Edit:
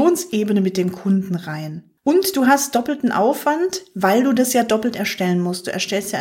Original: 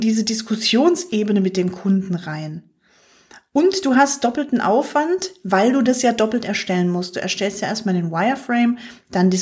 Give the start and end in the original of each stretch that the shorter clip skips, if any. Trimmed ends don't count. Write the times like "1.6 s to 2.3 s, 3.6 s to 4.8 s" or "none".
2.8 s to 3.5 s

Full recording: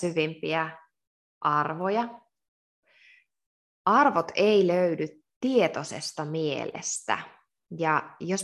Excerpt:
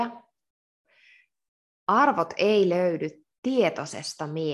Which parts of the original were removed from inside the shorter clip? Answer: none

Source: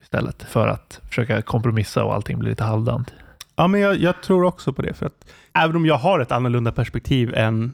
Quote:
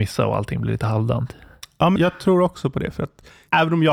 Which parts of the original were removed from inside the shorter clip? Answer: 3.7 s to 4.0 s

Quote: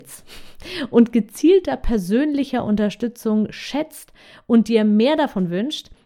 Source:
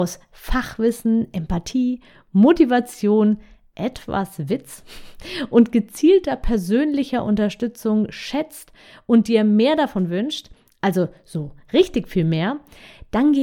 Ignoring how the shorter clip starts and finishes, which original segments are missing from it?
none

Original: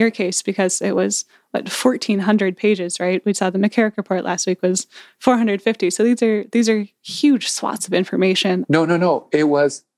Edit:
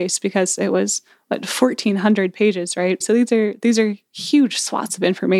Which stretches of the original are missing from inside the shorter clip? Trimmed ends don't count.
3.2 s to 5.9 s

